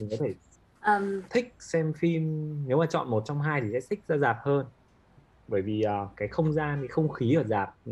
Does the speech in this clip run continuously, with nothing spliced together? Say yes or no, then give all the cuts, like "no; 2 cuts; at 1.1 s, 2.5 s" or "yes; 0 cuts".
no; 1 cut; at 1.3 s